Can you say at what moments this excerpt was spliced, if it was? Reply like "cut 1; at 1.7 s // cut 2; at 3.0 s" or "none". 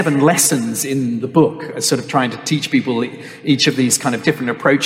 none